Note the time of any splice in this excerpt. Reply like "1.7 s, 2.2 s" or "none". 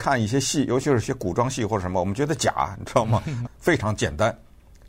3.5 s